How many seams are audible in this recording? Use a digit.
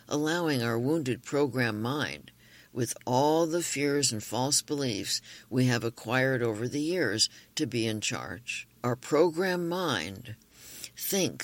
1